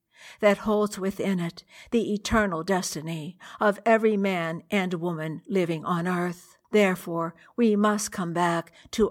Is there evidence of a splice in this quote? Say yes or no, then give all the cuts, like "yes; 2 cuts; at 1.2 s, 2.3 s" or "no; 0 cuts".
yes; 1 cut; at 6.6 s